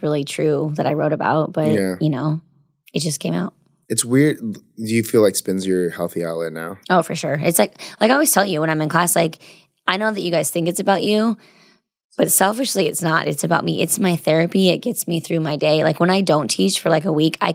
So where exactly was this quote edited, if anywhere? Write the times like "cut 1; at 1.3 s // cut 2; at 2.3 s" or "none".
none